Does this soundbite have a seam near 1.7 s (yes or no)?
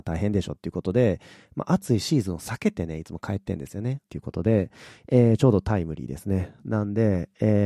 no